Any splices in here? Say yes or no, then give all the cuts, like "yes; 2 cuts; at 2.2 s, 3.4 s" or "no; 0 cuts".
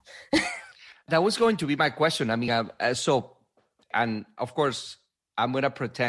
no; 0 cuts